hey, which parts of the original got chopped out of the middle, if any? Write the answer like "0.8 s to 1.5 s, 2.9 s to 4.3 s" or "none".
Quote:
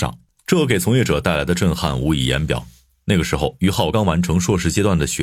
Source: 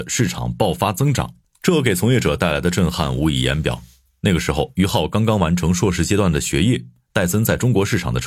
5.1 s to 5.3 s